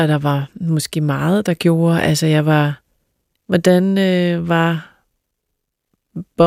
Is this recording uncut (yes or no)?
no